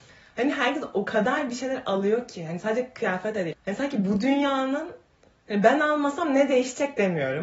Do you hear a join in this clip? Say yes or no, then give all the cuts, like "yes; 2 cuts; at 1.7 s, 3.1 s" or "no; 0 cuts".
yes; 1 cut; at 3.5 s